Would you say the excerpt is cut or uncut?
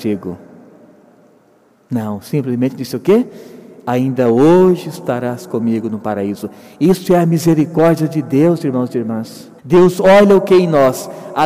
cut